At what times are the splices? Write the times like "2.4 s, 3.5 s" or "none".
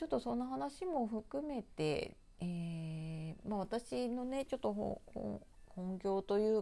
none